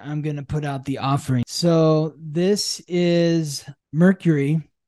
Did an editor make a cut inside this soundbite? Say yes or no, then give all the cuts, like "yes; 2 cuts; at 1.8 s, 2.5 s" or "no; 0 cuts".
no; 0 cuts